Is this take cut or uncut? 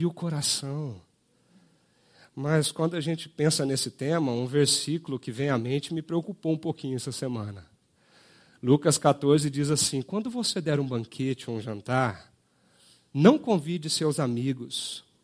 uncut